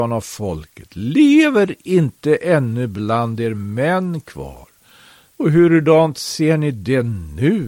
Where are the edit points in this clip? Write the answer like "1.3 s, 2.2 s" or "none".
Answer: 5.3 s

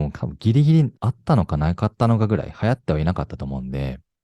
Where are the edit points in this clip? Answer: 1.0 s

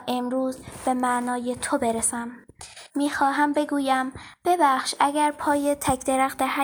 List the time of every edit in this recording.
2.9 s

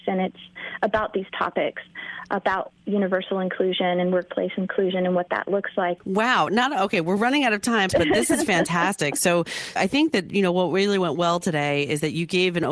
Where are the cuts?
6.0 s, 7.9 s, 9.8 s

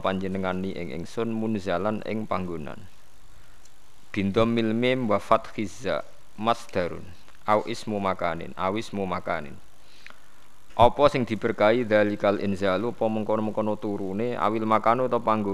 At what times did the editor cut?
10.7 s

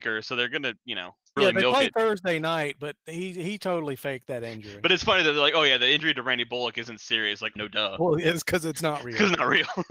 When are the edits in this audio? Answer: 1.4 s, 7.6 s

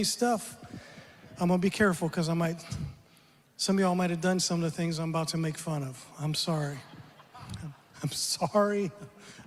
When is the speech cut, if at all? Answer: none

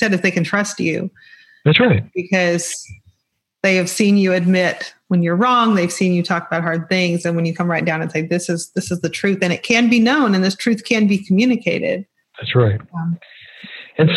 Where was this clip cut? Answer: none

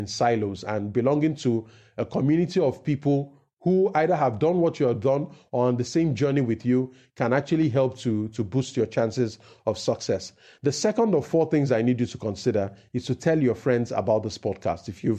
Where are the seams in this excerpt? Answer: none

